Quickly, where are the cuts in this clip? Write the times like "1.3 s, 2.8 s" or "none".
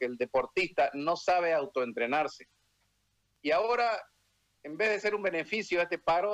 3.3 s